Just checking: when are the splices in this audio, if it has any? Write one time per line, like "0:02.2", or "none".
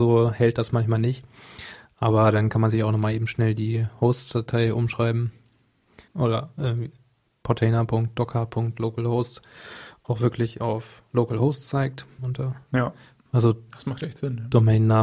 0:06.1
0:12.2